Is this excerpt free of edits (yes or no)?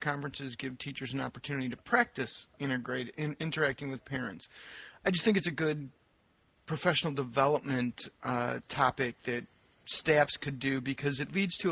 yes